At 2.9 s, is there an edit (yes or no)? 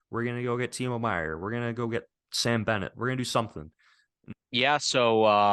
no